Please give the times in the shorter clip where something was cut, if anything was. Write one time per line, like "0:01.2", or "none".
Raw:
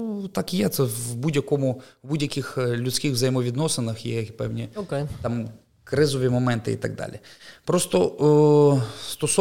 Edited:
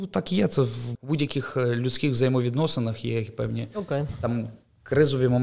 0:00.9